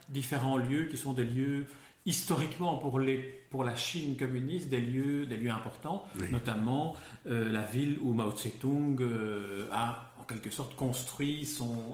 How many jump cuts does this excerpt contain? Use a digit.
0